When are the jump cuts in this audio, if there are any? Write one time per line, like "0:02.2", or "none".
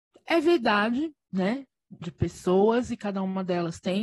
0:02.0

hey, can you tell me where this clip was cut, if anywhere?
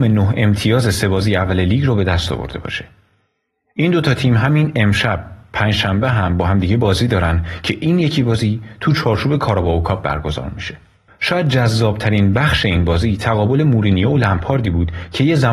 0:11.1

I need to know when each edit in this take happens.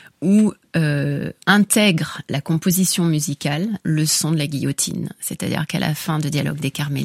0:01.4
0:03.8

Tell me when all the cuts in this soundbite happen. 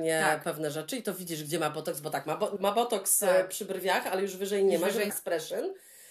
0:02.6
0:05.1

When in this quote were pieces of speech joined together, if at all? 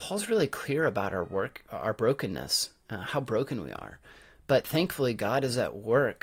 0:01.7

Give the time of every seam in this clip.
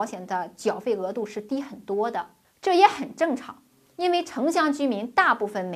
none

